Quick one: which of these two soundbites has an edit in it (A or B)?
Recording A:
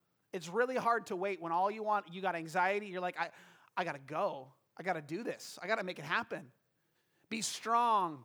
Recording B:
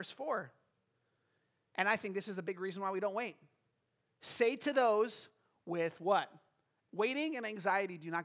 B